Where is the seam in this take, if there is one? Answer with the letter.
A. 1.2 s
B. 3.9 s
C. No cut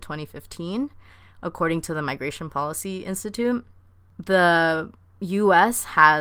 C